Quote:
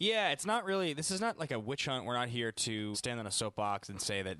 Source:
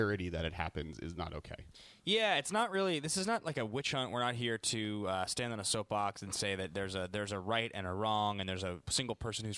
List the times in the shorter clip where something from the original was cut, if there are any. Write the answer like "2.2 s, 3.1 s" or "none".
2.9 s

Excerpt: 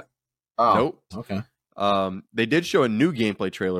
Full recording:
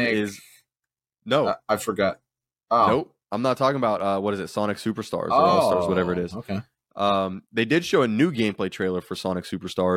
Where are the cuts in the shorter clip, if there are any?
1.1 s

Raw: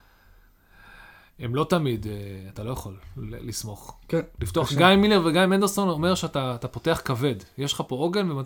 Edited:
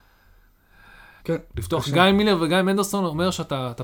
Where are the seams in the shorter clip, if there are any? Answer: 1.2 s

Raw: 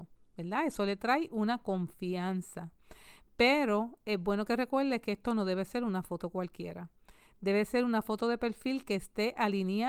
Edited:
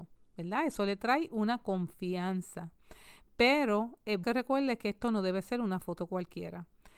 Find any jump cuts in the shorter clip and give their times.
4.2 s

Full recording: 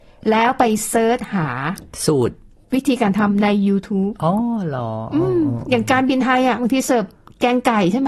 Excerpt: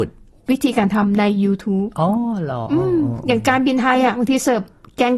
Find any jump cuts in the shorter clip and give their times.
2.7 s

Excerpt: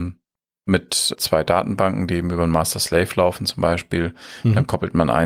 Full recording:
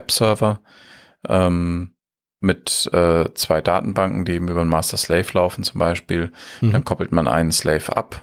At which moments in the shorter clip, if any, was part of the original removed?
1.2 s

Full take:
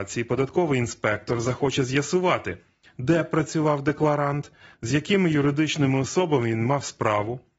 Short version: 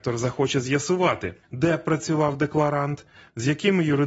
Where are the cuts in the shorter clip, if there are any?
1.4 s

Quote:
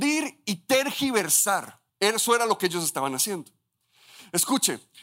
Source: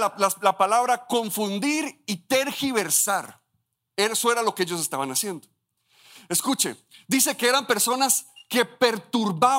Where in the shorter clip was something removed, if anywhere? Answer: 1.9 s

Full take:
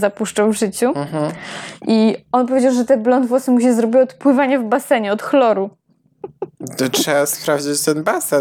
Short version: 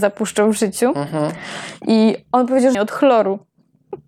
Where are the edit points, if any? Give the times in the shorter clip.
2.7 s

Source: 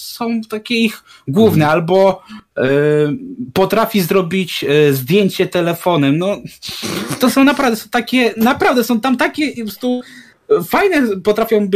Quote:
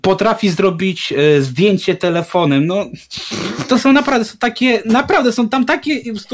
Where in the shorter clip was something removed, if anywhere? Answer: none

